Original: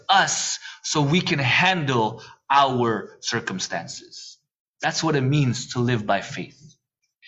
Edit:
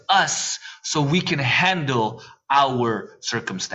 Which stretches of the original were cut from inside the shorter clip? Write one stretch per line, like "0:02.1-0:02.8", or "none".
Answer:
none